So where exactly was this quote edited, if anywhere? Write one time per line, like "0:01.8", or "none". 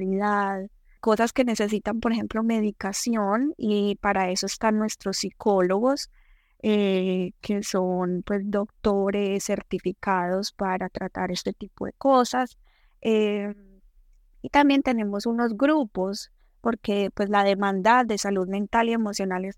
0:01.0